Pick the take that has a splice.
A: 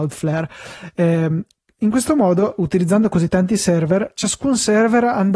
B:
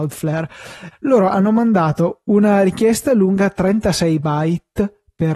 B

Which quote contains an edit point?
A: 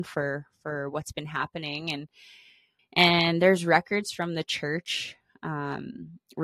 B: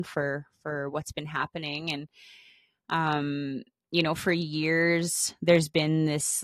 A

